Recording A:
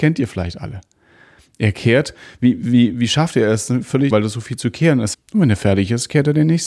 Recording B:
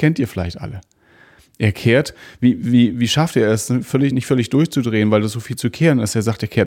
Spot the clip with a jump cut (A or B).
A